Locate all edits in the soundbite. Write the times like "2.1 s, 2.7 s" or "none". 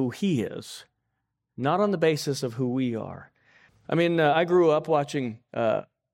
3.7 s